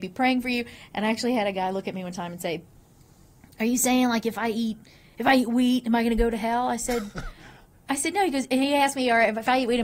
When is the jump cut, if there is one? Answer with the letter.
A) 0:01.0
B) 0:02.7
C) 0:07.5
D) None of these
D